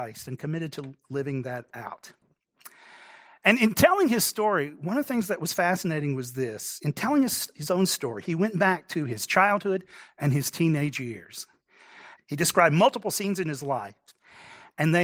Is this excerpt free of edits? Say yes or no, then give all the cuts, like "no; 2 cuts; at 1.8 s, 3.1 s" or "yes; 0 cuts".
no; 1 cut; at 12.2 s